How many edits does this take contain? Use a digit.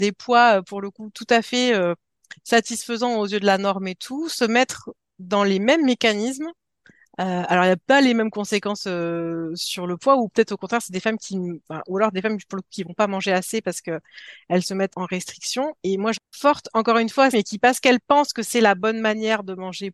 3